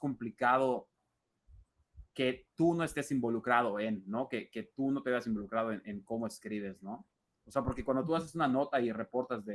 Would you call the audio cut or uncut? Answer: uncut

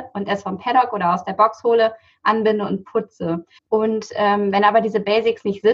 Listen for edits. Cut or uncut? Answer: cut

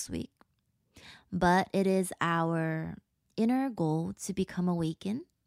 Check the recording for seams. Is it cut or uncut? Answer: uncut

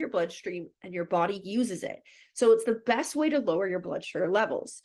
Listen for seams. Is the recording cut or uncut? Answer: uncut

